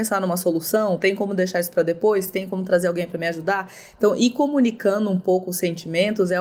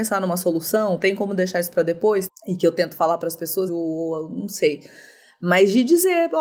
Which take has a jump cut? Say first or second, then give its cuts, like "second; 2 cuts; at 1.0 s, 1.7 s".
second; 2 cuts; at 2.3 s, 3.7 s